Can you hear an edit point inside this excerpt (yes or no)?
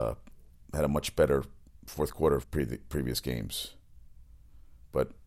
yes